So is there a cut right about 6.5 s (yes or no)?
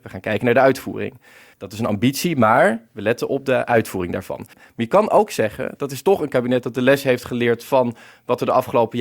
no